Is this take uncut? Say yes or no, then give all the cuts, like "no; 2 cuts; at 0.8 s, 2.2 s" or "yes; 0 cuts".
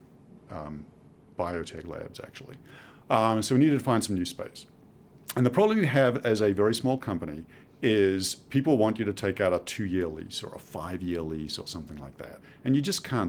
yes; 0 cuts